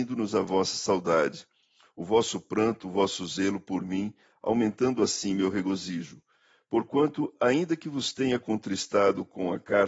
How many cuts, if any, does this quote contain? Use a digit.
0